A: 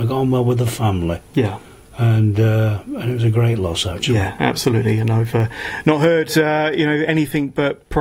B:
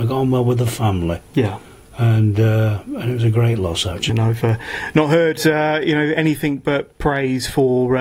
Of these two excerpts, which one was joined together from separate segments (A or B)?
B